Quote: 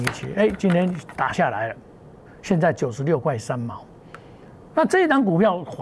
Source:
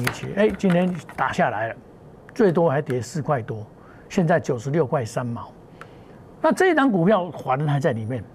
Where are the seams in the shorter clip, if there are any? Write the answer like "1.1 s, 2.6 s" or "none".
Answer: 2.3 s